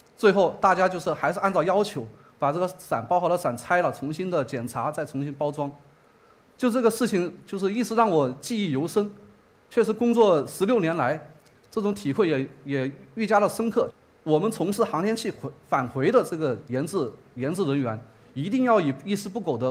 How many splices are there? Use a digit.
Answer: 0